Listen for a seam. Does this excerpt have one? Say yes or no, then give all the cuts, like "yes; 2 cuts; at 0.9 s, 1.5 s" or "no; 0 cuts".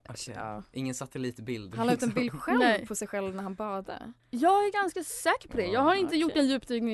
yes; 1 cut; at 4.2 s